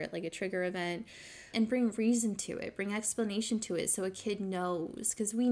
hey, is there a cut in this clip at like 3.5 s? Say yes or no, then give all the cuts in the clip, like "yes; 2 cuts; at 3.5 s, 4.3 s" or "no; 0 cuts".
no; 1 cut; at 1.5 s